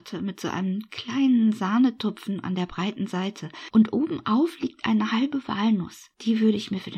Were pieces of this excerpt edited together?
no; 0 cuts

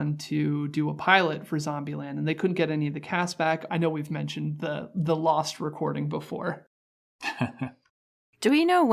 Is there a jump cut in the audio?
yes; 1 cut; at 3.7 s

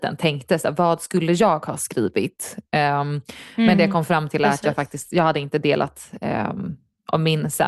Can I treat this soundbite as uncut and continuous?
yes; 0 cuts

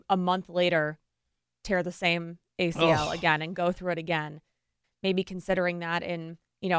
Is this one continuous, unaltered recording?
no; 1 cut; at 4.8 s

